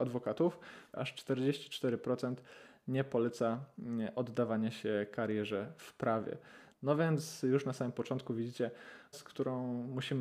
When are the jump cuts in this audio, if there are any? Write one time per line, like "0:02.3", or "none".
0:00.9
0:06.7
0:09.1